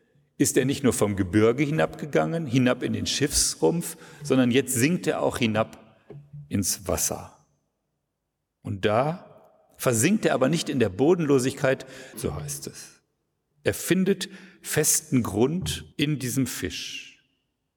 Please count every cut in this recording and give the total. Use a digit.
2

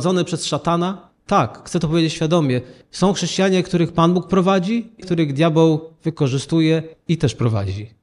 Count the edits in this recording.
1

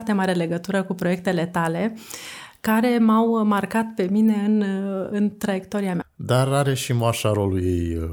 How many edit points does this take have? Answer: 1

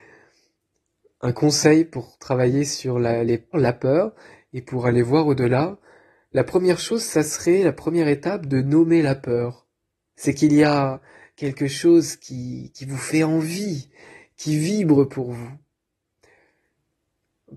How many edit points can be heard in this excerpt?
2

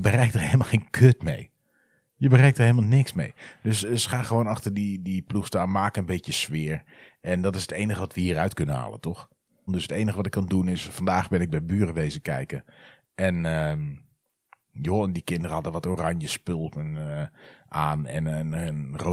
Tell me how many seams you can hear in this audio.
1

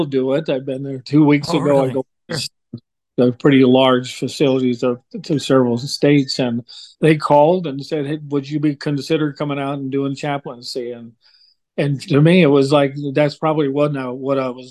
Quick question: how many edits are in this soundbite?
2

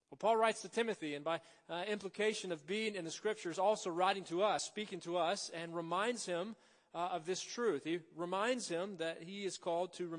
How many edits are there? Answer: 0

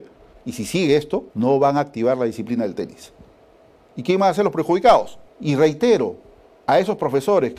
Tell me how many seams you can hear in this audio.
2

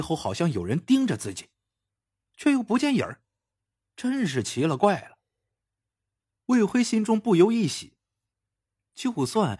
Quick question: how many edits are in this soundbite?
2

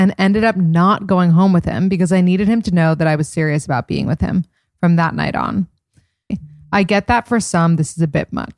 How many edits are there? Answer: 1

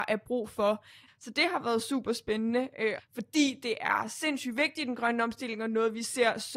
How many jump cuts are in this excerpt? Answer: 2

